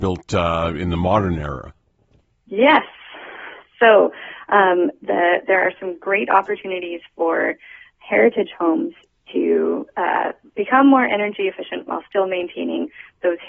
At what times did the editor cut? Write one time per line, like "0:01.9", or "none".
none